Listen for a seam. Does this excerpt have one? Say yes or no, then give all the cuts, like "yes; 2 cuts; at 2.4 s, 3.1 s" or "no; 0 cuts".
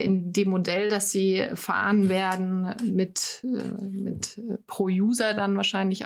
no; 0 cuts